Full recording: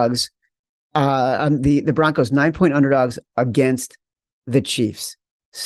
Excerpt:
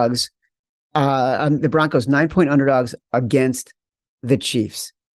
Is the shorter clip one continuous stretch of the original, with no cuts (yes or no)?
no